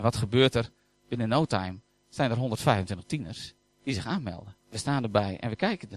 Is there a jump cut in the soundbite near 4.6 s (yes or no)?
yes